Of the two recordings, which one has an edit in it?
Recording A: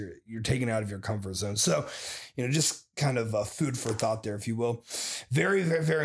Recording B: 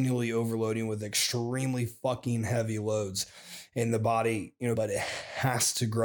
B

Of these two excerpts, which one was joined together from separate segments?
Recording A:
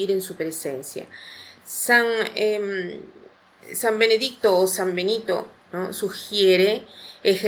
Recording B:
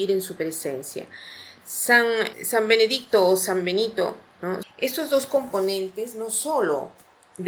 B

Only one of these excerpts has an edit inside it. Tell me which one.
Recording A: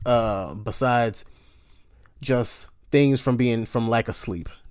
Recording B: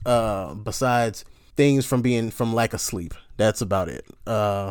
B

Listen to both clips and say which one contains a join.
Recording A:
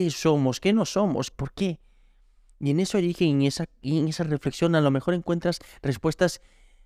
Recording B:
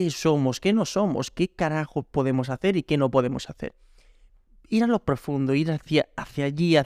A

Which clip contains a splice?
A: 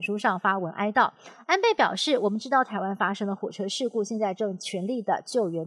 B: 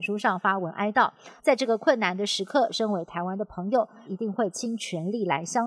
B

